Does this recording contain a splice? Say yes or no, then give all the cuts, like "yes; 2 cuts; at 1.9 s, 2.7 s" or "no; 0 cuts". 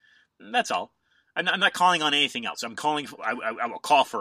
yes; 1 cut; at 3.2 s